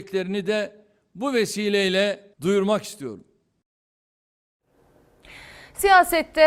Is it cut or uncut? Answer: cut